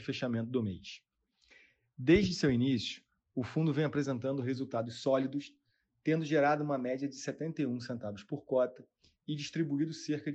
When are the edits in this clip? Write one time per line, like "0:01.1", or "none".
none